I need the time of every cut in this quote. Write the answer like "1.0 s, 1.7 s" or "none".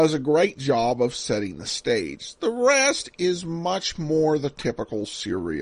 none